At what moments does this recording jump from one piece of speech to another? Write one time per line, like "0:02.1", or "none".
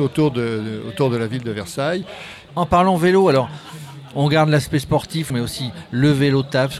0:02.5
0:05.3